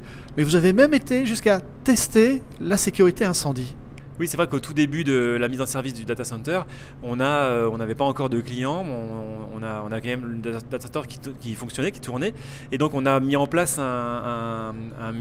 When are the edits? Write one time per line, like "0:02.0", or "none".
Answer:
none